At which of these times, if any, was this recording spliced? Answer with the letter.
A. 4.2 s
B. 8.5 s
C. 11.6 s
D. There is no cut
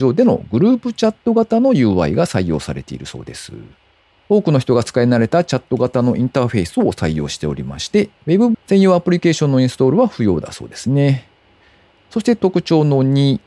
B